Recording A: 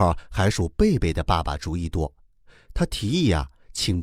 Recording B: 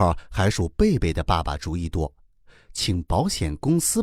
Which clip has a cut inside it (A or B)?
B